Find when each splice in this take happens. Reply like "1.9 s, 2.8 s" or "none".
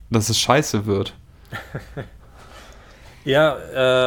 none